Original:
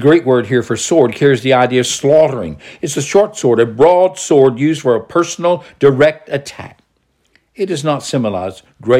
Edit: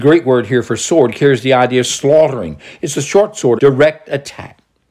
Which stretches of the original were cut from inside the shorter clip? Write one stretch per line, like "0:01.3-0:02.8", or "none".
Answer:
0:03.6-0:05.8